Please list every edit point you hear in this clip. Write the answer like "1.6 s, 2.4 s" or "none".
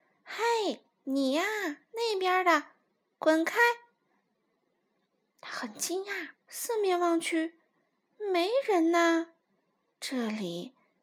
4.1 s, 6.4 s